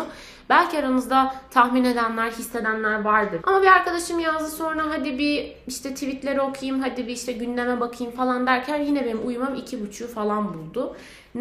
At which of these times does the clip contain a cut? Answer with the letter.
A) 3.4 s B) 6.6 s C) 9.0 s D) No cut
A